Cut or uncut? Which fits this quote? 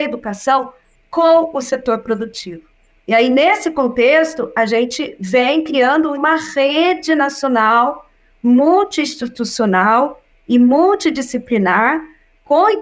cut